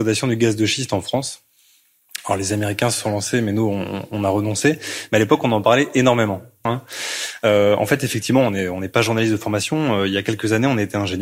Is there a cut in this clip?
yes; 1 cut; at 6.7 s

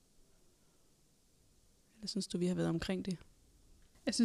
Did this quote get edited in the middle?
no; 0 cuts

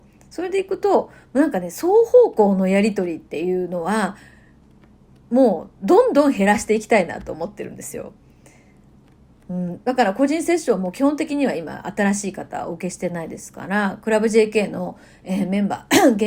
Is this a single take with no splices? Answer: yes; 0 cuts

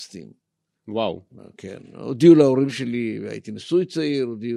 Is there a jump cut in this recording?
no; 0 cuts

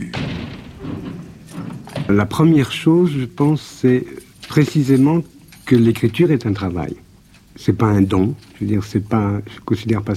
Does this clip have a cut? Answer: no; 0 cuts

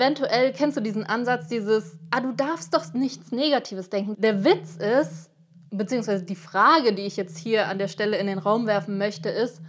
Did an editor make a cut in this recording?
yes; 1 cut; at 4.1 s

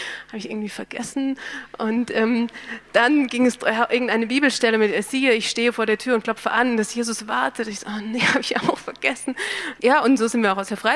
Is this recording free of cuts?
no; 1 cut; at 9.8 s

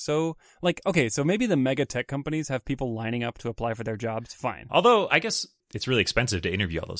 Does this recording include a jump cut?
yes; 1 cut; at 4.7 s

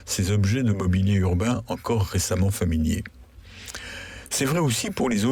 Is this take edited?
no; 0 cuts

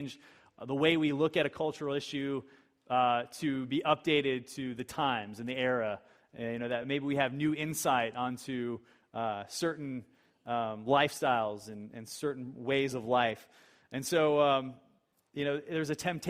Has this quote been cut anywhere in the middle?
no; 0 cuts

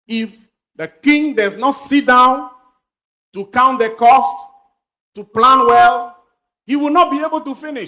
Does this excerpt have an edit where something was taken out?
no; 0 cuts

